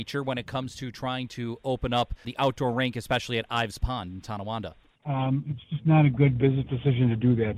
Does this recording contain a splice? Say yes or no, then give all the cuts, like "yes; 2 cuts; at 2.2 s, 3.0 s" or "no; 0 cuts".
yes; 3 cuts; at 2.2 s, 5.0 s, 6.4 s